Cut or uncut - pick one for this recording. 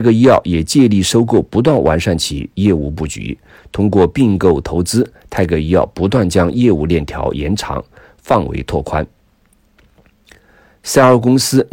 uncut